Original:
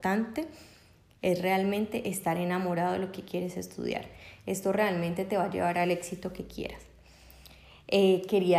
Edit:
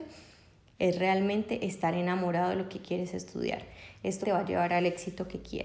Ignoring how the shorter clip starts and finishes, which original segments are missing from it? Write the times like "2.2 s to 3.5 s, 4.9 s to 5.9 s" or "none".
4.6 s to 5.3 s

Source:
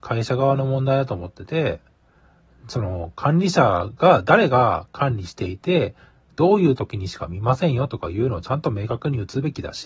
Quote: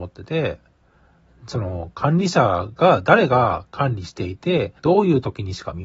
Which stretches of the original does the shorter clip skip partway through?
6.0 s to 6.3 s

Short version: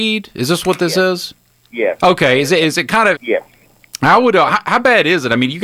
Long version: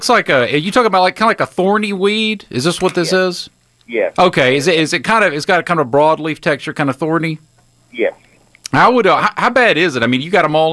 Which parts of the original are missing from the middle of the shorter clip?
5.3 s to 7.9 s

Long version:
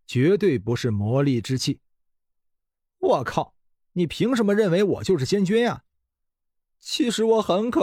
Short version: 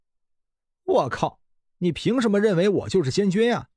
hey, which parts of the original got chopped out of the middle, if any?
none

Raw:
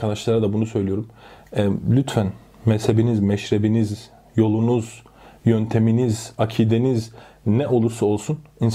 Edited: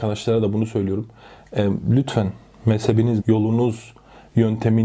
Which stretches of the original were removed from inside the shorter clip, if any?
3.2 s to 4.3 s

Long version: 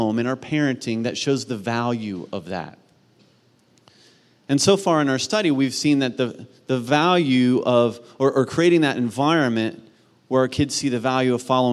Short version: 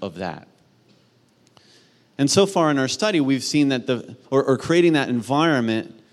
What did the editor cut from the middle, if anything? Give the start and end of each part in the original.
6.5 s to 8.1 s

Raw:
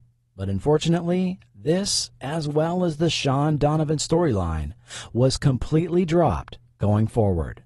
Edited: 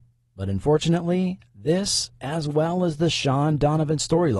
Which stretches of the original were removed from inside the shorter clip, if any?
none

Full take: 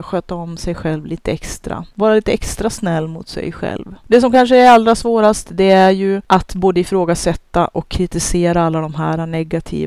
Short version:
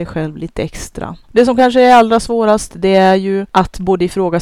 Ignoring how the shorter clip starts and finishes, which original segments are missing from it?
1.9 s to 4.0 s

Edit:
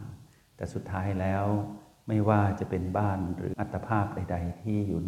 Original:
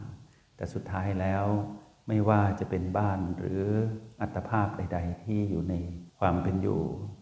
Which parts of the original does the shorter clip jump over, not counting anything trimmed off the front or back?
3.5 s to 4.2 s

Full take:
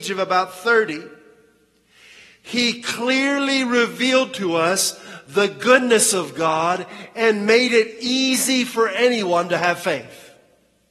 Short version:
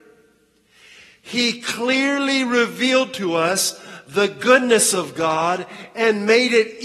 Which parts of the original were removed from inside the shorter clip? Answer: none

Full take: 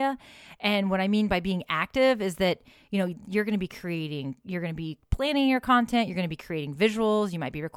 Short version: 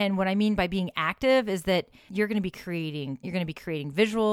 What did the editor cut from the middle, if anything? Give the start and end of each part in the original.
2.8 s to 3.2 s, 4.4 s to 6.1 s

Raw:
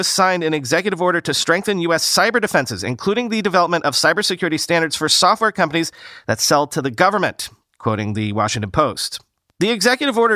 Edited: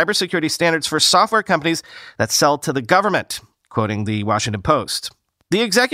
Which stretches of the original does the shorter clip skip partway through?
none

